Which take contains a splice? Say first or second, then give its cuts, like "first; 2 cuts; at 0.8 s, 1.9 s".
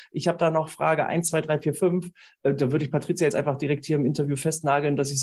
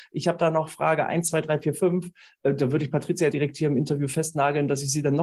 second; 1 cut; at 3.3 s